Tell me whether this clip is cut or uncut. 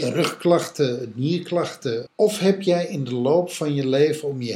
cut